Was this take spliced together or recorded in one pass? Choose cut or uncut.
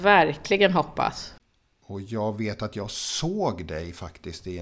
cut